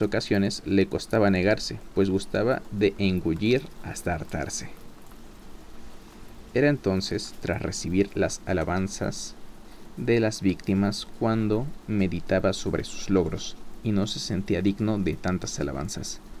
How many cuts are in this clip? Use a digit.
0